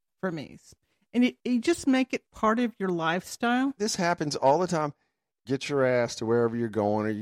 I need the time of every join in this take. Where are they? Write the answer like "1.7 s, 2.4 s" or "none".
3.8 s, 5.5 s

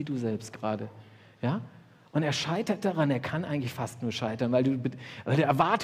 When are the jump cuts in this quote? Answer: none

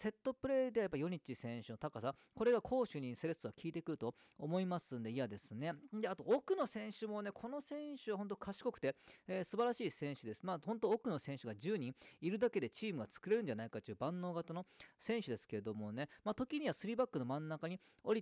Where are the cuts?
none

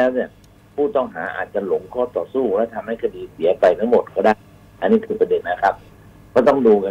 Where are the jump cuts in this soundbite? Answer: 5.4 s

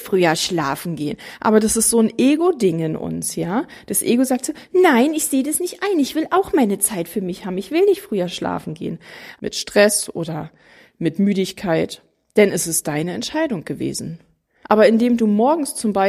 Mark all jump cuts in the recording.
9.4 s, 14.6 s

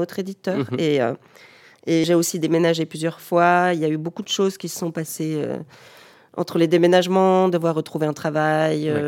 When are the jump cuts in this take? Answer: 2.0 s

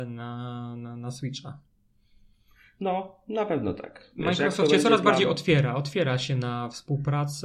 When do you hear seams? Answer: none

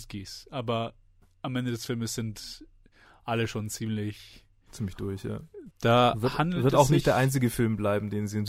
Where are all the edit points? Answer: 5.7 s

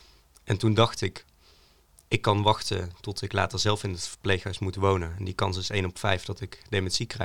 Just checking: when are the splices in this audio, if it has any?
none

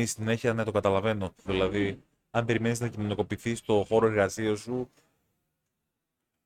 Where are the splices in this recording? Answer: 1.5 s

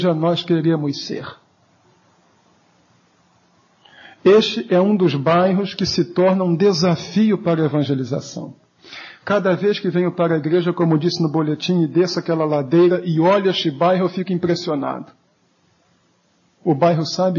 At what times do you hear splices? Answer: none

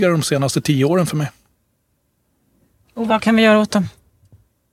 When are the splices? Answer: none

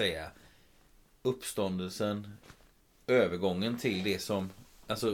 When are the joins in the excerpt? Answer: none

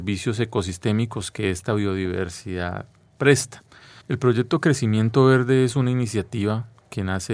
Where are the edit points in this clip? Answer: 4.0 s

